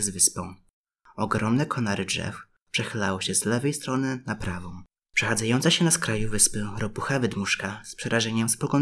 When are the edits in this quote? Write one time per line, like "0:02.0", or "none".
0:05.0